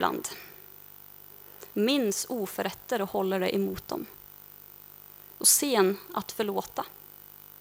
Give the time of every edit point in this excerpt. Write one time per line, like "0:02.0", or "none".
0:01.7